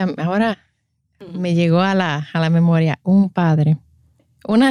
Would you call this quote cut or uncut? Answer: uncut